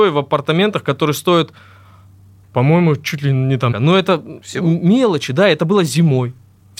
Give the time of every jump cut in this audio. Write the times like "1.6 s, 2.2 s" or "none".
3.7 s